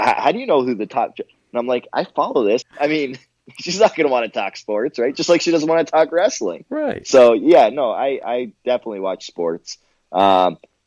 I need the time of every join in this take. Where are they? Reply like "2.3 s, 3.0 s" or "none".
2.6 s